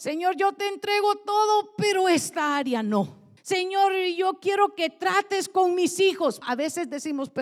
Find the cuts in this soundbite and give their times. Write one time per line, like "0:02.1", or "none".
0:03.4
0:06.4